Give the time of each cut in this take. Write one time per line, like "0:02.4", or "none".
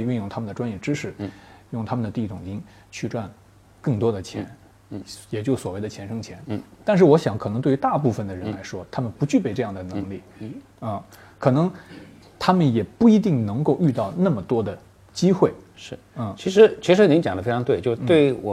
none